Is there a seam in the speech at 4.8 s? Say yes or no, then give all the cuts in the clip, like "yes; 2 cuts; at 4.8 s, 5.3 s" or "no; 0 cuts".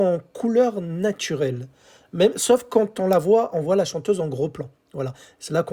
no; 0 cuts